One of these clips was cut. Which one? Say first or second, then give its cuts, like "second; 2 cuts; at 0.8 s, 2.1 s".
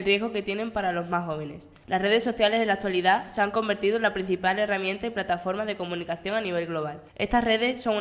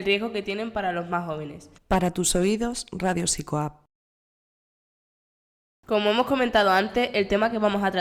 second; 1 cut; at 1.8 s